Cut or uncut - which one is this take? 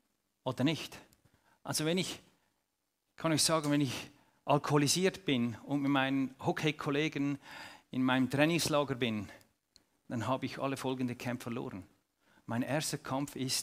cut